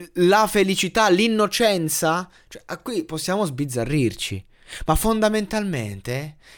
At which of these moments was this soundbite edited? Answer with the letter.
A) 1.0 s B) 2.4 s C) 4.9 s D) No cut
D